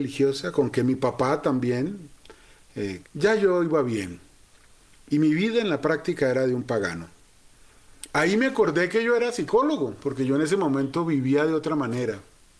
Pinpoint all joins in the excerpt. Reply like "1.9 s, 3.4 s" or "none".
3.0 s, 8.1 s